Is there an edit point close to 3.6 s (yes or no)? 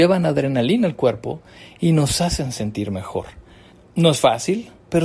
no